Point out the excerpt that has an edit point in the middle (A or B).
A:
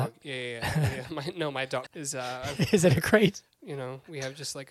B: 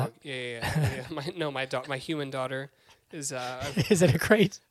A